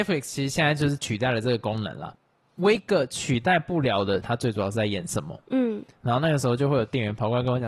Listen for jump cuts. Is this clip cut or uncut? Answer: cut